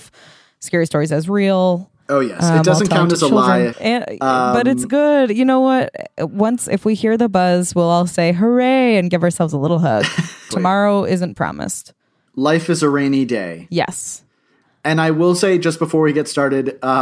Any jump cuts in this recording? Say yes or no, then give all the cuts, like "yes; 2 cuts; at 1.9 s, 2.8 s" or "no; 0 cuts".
yes; 2 cuts; at 3.7 s, 10.5 s